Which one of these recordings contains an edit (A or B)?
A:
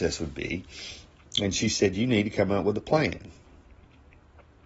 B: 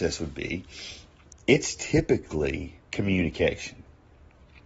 B